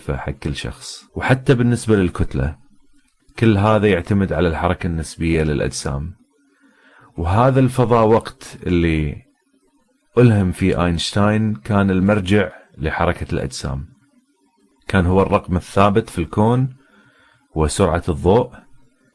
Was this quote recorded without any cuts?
no; 1 cut; at 1.1 s

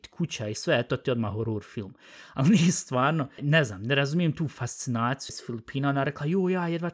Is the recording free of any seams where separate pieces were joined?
no; 2 cuts; at 3.4 s, 5.3 s

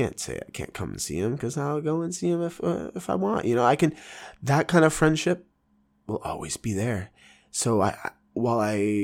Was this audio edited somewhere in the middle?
no; 0 cuts

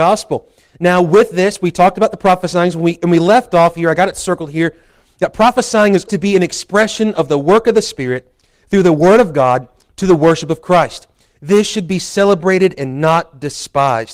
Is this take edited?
yes; 1 cut; at 6.1 s

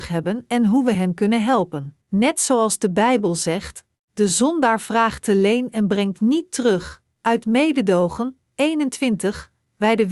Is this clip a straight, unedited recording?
no; 3 cuts; at 2.0 s, 7.1 s, 8.5 s

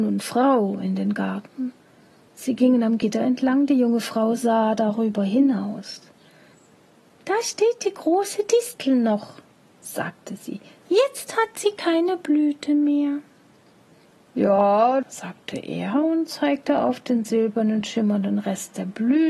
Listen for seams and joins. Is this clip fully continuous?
no; 1 cut; at 15.0 s

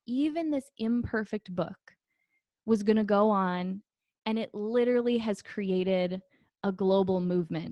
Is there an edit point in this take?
no; 0 cuts

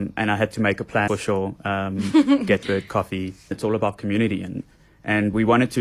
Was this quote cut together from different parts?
yes; 2 cuts; at 1.1 s, 3.5 s

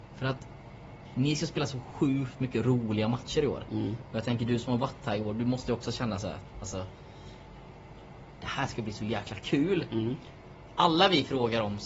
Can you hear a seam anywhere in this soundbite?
no; 0 cuts

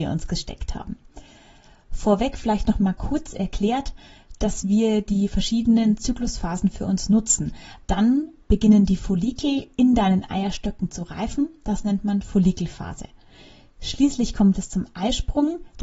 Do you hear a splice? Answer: yes; 2 cuts; at 4.4 s, 7.8 s

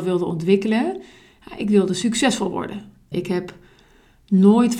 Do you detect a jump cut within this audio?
yes; 1 cut; at 3.1 s

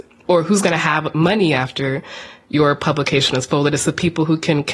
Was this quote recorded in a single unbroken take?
yes; 0 cuts

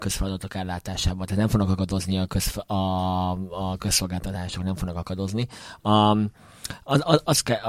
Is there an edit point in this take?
no; 0 cuts

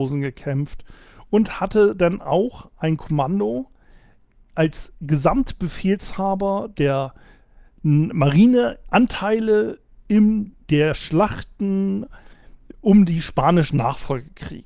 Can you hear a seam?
no; 0 cuts

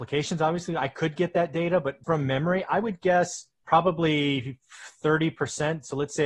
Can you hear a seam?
yes; 2 cuts; at 2.0 s, 3.5 s

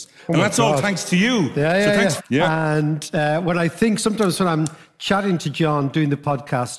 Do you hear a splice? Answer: yes; 1 cut; at 2.2 s

